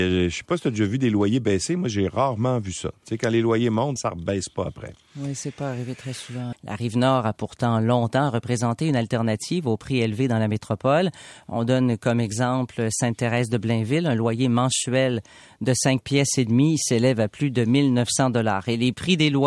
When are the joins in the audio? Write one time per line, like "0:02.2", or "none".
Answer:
0:04.0
0:06.5